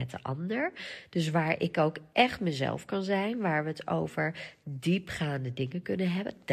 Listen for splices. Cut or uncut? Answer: uncut